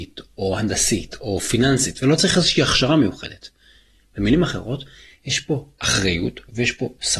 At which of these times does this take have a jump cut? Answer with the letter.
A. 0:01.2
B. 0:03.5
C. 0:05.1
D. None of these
D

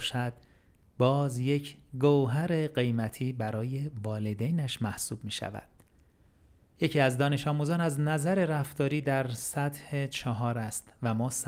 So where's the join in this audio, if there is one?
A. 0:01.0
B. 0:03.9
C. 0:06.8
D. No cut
C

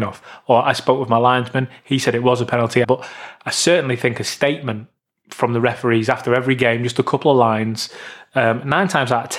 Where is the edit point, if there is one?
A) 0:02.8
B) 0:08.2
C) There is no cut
A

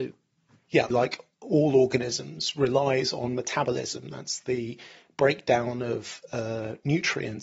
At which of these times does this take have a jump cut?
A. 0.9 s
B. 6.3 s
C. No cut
A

